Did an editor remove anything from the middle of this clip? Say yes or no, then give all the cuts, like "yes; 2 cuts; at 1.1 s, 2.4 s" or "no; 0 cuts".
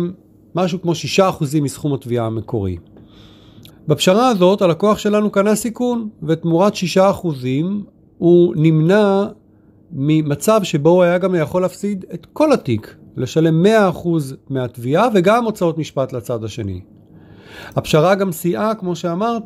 yes; 1 cut; at 3.7 s